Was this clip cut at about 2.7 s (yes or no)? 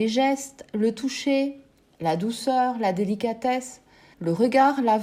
no